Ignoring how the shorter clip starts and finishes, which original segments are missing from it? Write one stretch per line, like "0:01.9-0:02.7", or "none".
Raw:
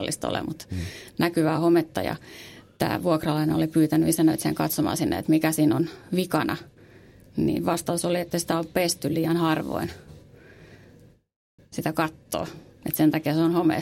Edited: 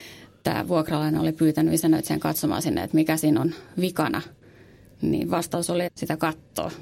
0:08.2-0:11.6